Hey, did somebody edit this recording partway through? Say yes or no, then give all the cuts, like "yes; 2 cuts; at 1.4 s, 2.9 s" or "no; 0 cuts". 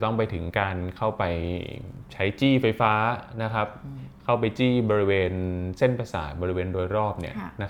no; 0 cuts